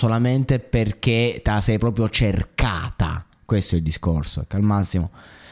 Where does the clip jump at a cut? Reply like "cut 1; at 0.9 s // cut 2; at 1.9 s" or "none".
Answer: none